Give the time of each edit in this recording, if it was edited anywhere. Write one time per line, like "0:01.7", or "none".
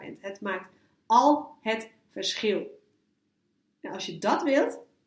none